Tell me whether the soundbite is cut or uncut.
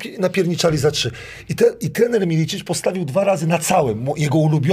uncut